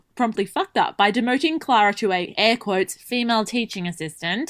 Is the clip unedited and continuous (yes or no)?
yes